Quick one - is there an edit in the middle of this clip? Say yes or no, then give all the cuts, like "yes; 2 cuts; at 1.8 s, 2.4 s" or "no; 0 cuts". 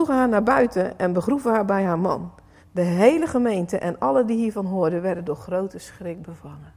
yes; 1 cut; at 2.6 s